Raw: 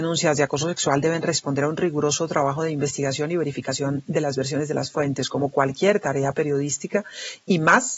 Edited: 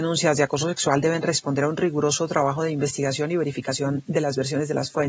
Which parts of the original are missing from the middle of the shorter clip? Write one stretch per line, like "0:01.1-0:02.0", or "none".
none